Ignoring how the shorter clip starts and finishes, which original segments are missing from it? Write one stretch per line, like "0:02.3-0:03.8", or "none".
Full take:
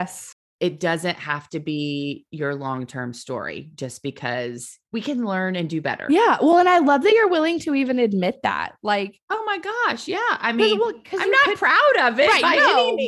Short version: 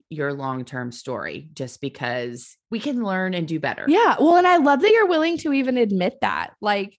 none